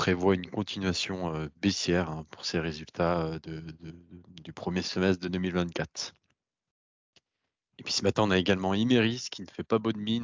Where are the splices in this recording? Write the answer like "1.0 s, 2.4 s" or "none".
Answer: none